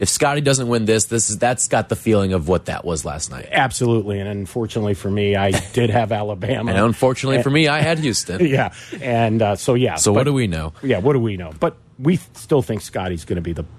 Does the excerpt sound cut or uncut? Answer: uncut